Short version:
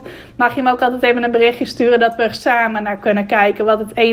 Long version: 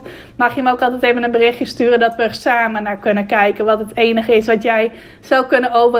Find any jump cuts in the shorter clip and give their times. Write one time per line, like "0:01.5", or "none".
none